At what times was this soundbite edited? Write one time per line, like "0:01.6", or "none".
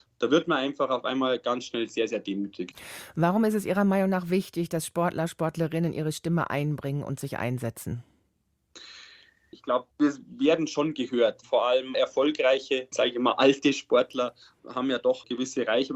0:12.9